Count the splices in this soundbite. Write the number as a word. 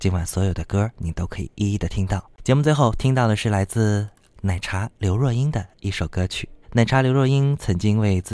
one